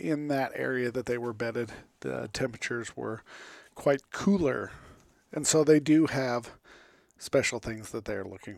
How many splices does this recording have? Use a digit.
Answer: 0